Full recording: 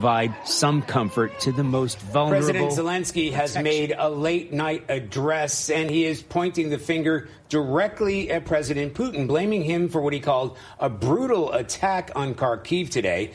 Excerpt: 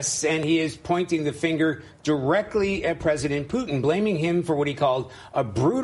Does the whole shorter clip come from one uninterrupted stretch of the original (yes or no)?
yes